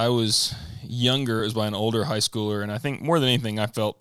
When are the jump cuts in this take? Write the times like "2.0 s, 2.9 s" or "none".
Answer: none